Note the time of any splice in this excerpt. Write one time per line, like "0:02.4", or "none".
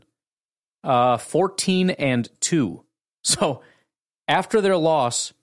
none

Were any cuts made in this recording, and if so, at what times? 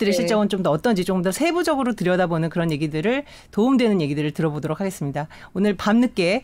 none

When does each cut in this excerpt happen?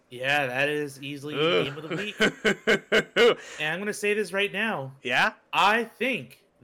none

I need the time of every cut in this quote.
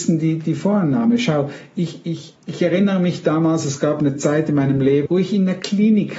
0:02.4
0:05.1

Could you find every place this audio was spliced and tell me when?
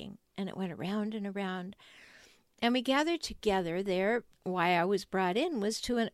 0:04.3

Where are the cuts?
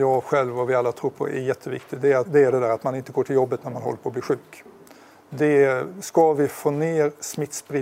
0:02.3

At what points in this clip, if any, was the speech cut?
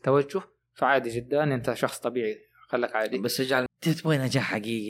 0:03.7

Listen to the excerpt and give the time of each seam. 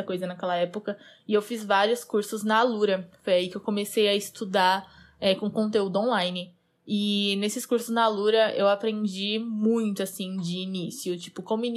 none

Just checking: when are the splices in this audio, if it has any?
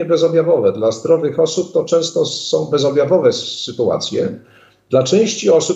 none

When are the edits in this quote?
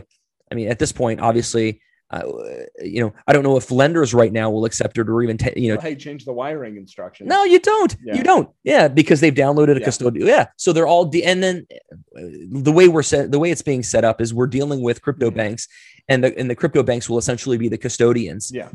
0:05.8

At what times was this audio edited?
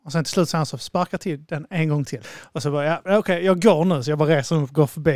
0:02.2

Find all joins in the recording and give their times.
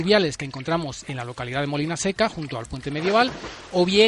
none

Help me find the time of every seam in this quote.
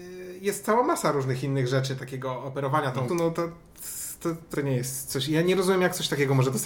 0:02.0
0:03.1
0:04.5

